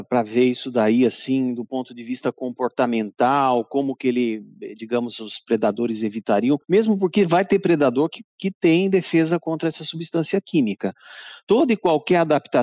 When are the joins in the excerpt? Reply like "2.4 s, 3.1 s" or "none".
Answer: none